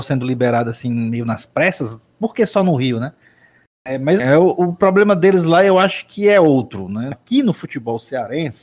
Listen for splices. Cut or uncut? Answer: cut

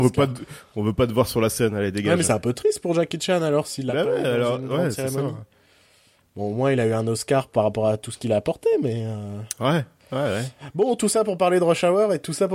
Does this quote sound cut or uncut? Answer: uncut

